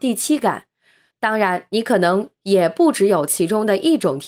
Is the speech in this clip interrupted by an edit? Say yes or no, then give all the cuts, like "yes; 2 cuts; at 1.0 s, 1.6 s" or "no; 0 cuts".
yes; 1 cut; at 1.1 s